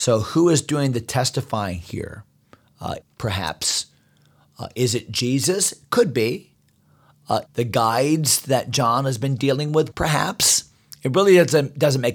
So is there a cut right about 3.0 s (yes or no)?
yes